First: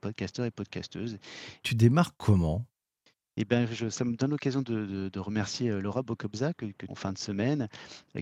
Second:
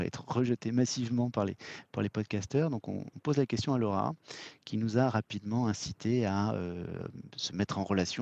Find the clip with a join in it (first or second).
first